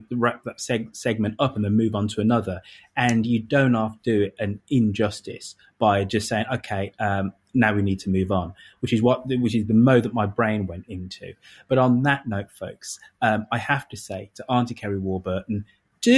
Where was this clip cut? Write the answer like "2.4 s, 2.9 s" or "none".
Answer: none